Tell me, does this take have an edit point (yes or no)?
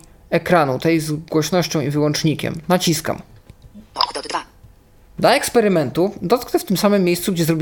yes